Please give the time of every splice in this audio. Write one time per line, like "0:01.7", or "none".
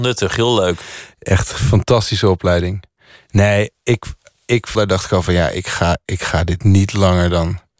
0:04.7